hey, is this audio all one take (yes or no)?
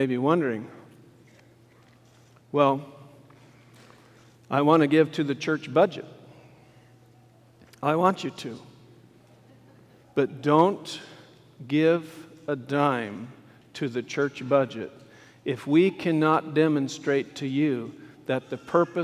no